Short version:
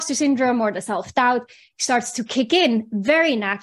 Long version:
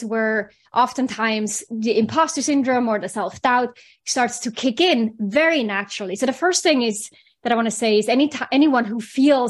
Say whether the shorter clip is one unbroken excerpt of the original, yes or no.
yes